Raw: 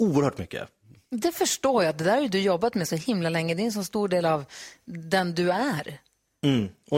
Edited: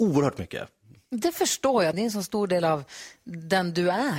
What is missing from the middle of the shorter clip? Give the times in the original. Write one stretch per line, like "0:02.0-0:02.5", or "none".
0:01.9-0:03.5